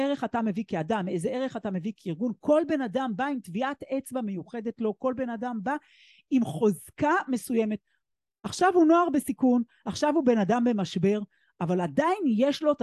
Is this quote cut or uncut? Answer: uncut